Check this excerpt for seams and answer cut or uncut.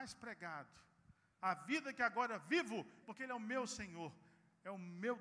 cut